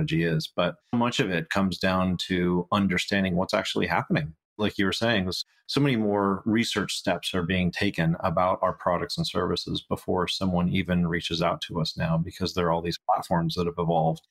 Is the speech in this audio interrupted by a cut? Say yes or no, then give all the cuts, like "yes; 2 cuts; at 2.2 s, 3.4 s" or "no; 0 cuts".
yes; 1 cut; at 0.9 s